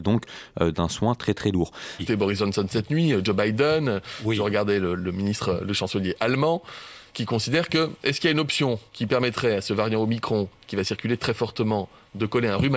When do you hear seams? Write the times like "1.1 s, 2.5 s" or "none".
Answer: 2.0 s, 8.9 s